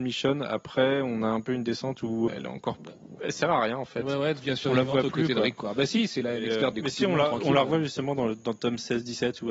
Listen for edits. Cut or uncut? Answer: cut